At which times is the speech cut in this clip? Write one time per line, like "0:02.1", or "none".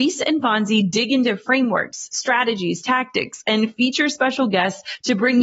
none